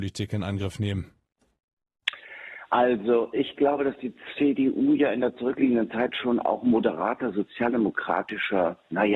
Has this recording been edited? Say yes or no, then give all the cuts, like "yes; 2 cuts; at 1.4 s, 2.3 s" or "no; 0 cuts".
no; 0 cuts